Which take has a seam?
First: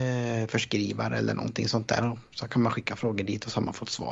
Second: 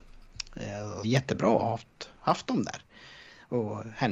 second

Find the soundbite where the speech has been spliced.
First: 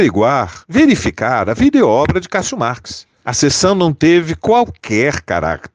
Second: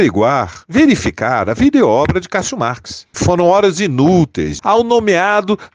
second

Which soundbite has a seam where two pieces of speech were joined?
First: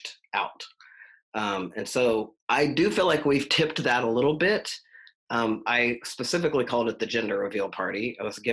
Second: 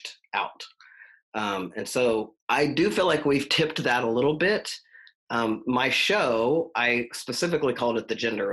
first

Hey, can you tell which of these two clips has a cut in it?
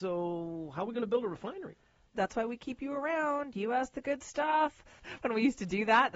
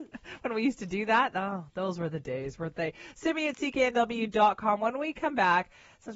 first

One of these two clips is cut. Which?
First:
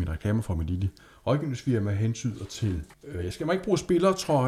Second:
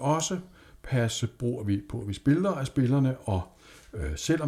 first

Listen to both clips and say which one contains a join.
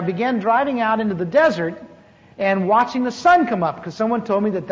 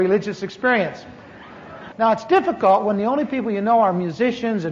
second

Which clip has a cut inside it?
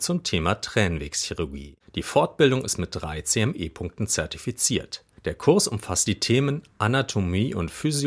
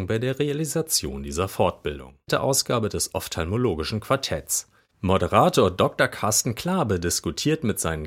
second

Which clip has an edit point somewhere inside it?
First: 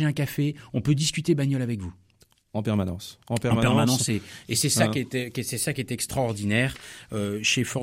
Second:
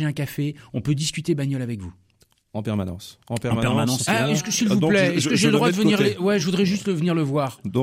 second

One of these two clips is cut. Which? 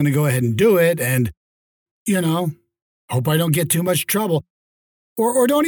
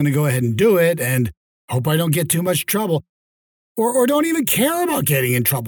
second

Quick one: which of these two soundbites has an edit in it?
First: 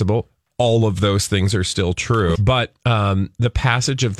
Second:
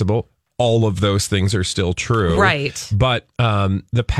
first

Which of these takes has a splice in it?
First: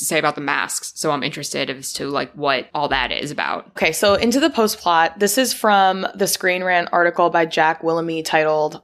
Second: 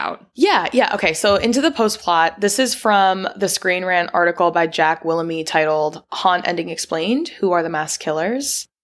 first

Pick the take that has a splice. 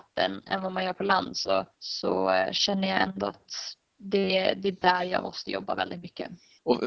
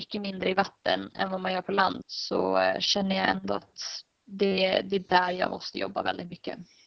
second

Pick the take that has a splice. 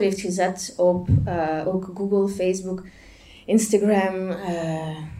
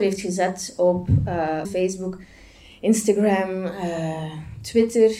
second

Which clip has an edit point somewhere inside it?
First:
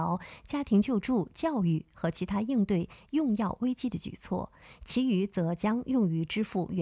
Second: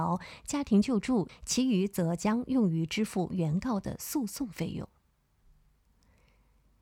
second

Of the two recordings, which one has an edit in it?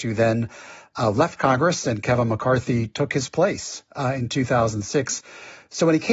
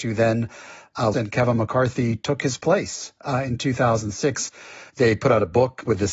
second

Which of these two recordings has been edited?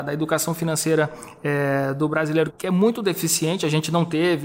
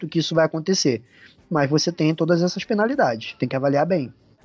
first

